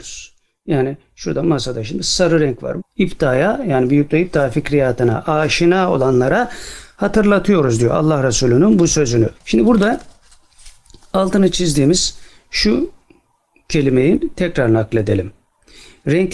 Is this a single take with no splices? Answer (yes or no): no